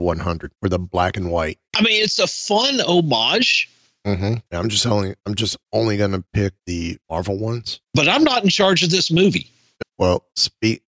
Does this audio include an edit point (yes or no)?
yes